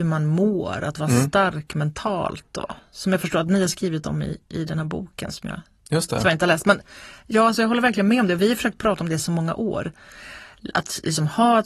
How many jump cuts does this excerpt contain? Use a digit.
0